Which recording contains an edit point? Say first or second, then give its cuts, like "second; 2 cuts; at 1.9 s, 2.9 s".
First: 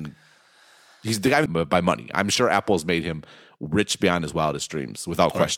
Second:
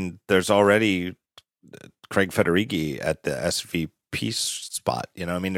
first; 1 cut; at 1.5 s